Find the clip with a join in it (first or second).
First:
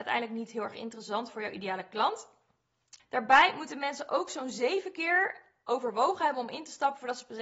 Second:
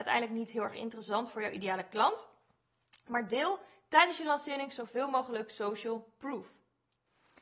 first